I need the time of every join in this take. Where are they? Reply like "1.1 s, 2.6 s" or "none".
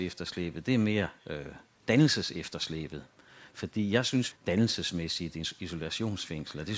4.3 s